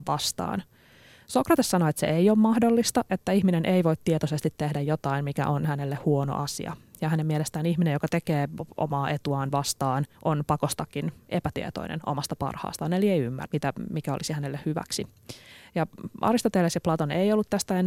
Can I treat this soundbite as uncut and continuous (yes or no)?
no